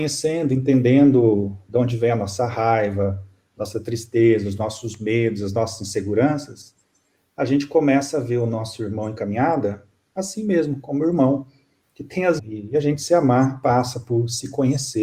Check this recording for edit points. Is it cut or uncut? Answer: cut